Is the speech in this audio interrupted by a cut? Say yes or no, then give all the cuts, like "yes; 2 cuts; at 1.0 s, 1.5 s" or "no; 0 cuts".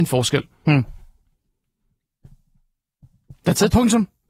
no; 0 cuts